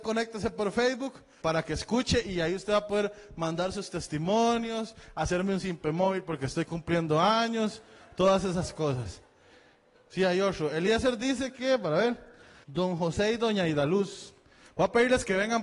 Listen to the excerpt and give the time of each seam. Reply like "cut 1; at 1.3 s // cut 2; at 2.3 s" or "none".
cut 1; at 1.4 s // cut 2; at 9.9 s // cut 3; at 12.6 s